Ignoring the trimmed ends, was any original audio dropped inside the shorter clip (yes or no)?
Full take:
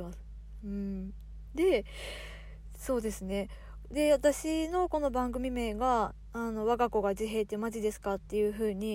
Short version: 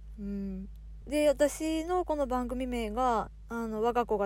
yes